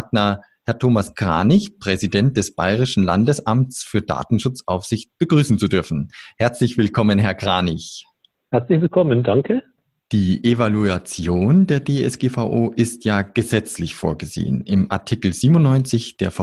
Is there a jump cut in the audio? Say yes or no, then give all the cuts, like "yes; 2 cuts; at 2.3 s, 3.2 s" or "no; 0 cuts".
no; 0 cuts